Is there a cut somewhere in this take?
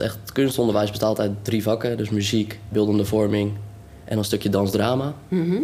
yes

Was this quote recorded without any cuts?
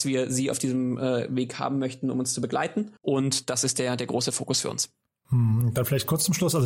no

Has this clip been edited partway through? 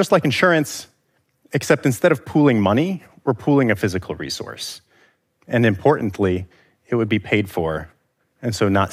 no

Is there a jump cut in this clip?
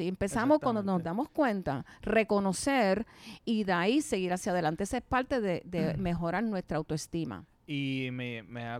no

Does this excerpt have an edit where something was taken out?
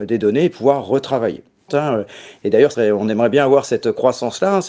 yes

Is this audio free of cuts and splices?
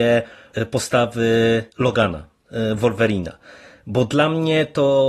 no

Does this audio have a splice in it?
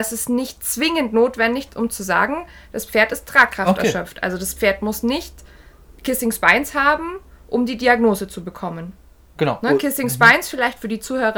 no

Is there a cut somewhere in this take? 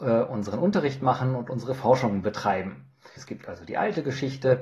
yes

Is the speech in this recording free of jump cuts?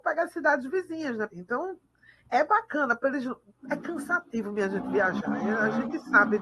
no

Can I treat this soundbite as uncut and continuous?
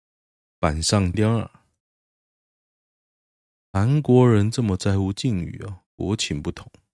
no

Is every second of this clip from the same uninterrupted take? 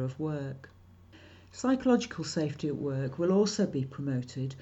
yes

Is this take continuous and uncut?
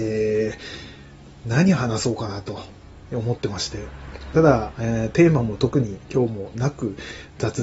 yes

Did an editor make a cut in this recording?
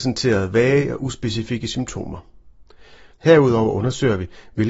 yes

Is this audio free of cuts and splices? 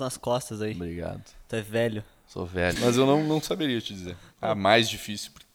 no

